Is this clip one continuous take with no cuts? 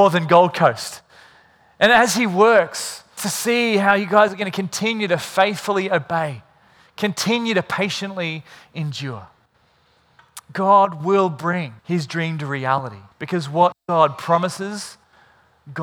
no; 3 cuts; at 3.2 s, 11.8 s, 13.1 s

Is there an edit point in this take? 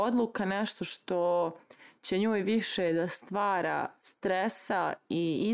no; 0 cuts

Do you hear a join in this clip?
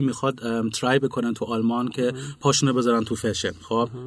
no; 0 cuts

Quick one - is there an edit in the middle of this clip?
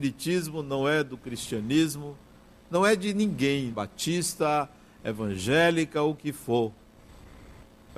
yes; 1 cut; at 3.7 s

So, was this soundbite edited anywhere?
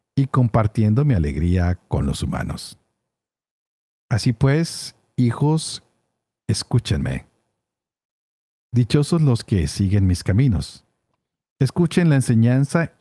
no; 0 cuts

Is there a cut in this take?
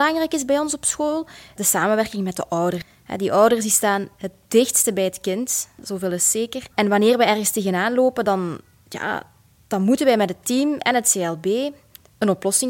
yes; 2 cuts; at 1.6 s, 6.7 s

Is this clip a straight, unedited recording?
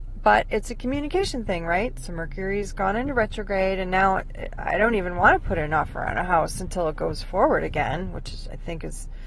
yes; 0 cuts

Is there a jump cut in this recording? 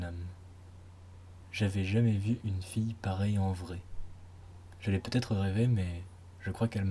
no; 0 cuts

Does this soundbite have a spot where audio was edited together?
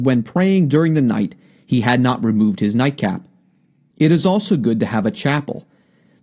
yes; 1 cut; at 3.9 s

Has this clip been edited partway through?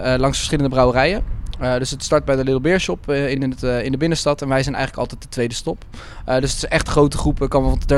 no; 0 cuts

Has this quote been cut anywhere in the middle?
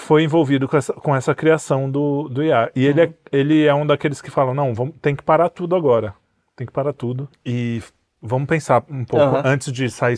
no; 0 cuts

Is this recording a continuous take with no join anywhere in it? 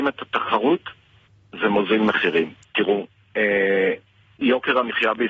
no; 1 cut; at 2.6 s

